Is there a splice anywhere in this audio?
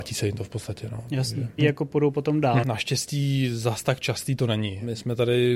yes; 2 cuts; at 1.6 s, 2.6 s

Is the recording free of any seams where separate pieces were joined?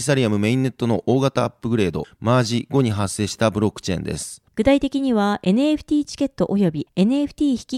no; 1 cut; at 4.5 s

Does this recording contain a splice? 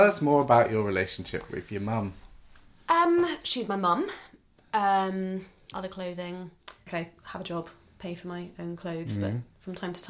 yes; 2 cuts; at 5.7 s, 6.9 s

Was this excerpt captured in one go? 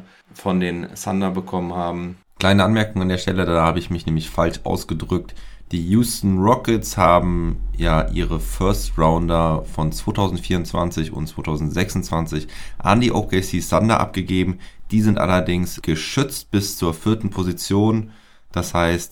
yes; 0 cuts

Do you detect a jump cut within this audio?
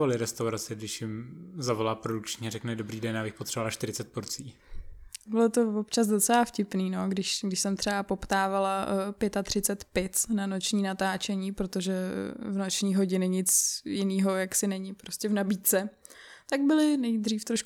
yes; 1 cut; at 5.2 s

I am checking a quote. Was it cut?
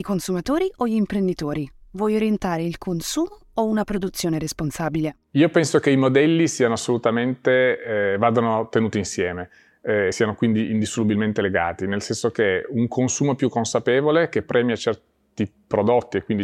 no; 0 cuts

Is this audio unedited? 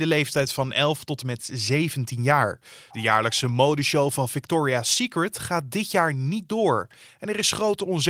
no; 1 cut; at 2.9 s

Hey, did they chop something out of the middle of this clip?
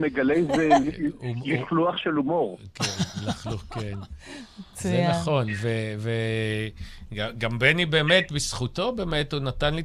no; 0 cuts

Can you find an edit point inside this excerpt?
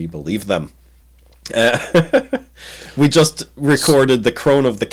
no; 0 cuts

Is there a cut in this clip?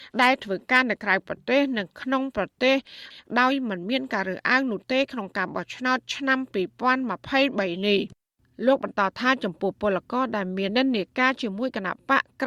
yes; 1 cut; at 10.7 s

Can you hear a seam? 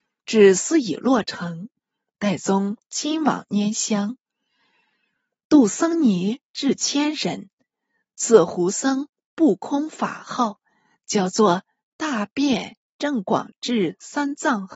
no; 0 cuts

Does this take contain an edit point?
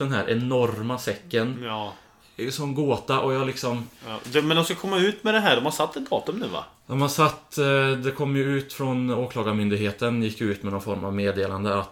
no; 0 cuts

